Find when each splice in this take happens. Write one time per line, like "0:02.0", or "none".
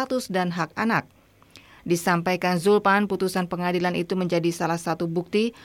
0:01.8